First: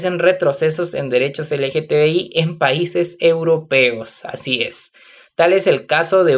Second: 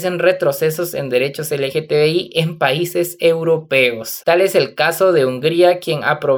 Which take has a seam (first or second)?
second